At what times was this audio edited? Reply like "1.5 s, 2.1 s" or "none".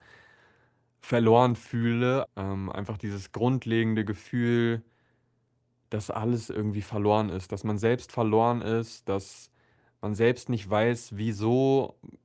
2.2 s